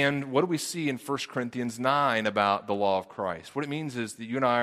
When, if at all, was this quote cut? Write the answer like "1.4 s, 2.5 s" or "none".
none